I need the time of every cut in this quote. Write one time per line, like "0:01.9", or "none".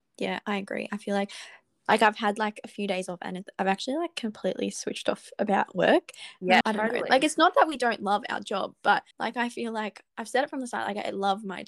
0:06.6
0:09.1